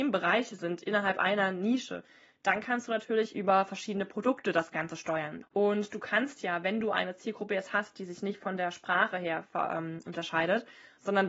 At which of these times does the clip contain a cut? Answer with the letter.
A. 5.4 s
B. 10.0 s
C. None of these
A